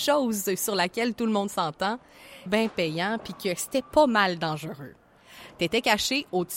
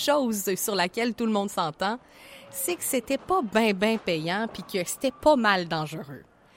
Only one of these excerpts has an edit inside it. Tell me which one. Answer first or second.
first